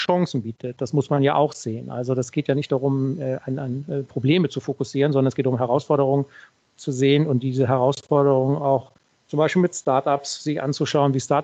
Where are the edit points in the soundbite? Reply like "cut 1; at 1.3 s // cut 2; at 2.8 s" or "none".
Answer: none